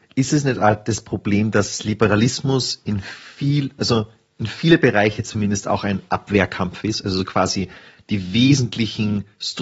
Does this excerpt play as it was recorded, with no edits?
yes; 0 cuts

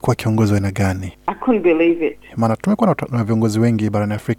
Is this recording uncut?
no; 2 cuts; at 1.1 s, 2.3 s

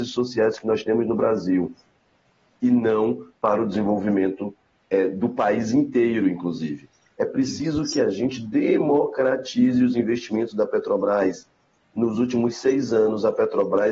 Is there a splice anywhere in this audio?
no; 0 cuts

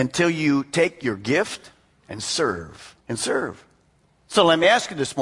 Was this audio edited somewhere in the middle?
yes; 1 cut; at 3.0 s

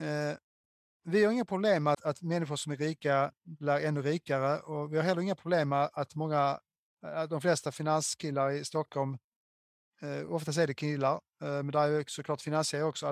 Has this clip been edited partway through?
yes; 1 cut; at 1.9 s

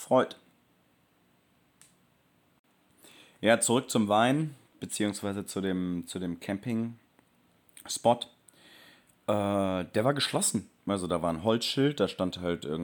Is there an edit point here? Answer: no; 0 cuts

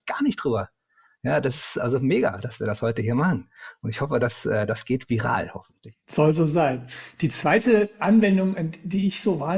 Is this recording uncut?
yes; 0 cuts

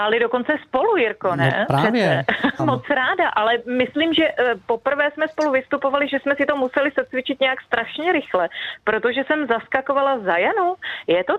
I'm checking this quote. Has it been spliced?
yes; 1 cut; at 2.6 s

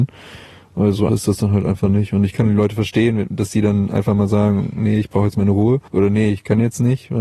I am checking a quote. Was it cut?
yes; 2 cuts; at 1.1 s, 5.9 s

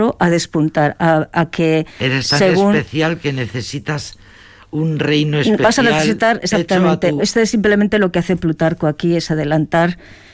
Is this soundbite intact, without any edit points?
no; 1 cut; at 7.2 s

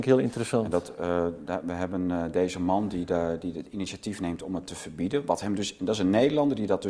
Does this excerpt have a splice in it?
no; 0 cuts

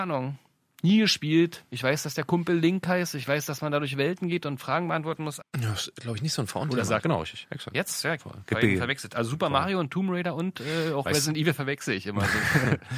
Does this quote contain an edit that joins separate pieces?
yes; 3 cuts; at 5.4 s, 7.0 s, 8.2 s

